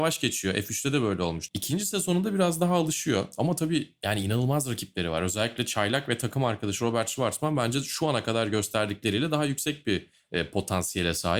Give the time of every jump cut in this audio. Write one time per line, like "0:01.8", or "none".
0:01.5